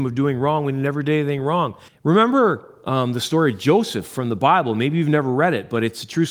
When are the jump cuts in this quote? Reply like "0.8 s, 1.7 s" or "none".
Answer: 1.9 s

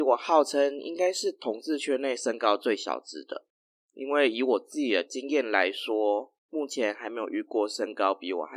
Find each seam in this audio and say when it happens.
none

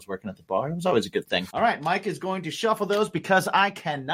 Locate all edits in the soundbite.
1.5 s

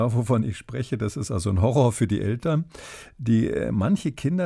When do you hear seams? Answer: none

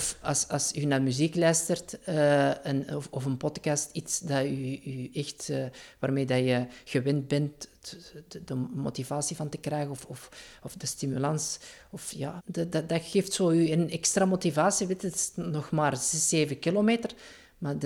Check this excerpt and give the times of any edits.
12.4 s

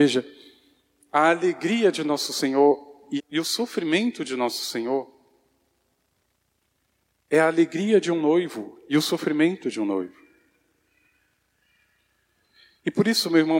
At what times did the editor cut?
3.2 s

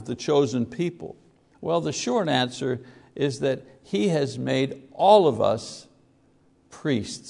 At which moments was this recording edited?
1.5 s

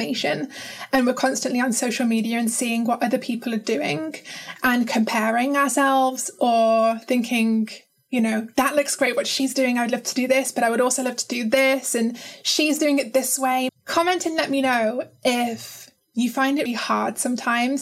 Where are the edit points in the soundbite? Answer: 13.7 s, 16.7 s

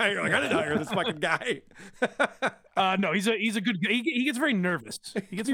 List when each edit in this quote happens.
none

